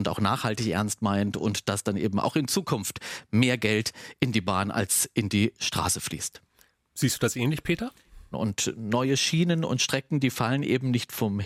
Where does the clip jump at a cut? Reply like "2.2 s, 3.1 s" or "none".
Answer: 8.3 s